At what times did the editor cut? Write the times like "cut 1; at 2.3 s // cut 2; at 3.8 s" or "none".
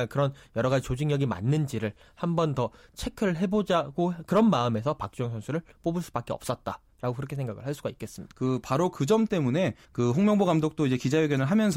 cut 1; at 8.3 s // cut 2; at 9.8 s